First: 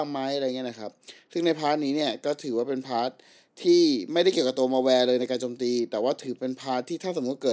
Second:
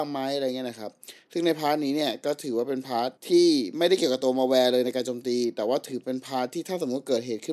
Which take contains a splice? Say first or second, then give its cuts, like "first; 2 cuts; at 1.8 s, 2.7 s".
second; 1 cut; at 3.2 s